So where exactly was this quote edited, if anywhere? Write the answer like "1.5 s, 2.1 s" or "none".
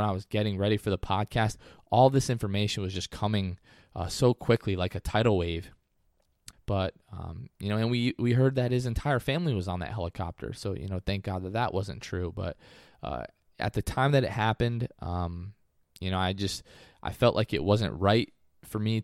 6.5 s